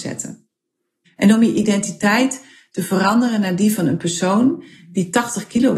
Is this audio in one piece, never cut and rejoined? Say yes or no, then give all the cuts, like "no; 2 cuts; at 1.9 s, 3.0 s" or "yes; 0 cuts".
no; 1 cut; at 1.1 s